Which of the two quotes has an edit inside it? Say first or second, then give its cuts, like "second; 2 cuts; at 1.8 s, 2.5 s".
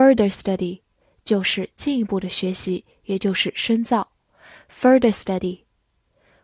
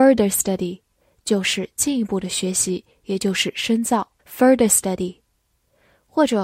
second; 1 cut; at 4.2 s